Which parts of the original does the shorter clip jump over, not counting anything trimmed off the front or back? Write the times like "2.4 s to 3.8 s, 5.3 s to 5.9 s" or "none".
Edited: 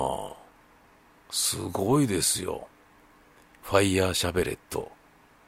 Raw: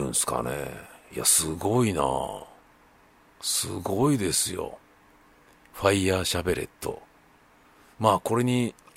none